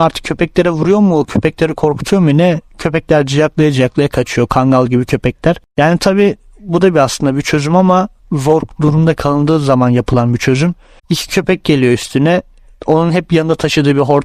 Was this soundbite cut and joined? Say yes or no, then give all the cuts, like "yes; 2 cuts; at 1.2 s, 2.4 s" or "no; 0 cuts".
yes; 1 cut; at 11.0 s